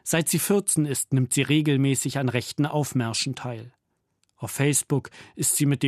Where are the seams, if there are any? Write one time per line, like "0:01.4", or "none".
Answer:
none